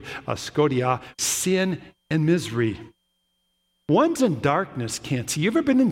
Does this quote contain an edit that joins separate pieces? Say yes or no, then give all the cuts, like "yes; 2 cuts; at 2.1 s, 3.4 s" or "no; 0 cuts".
yes; 1 cut; at 1.1 s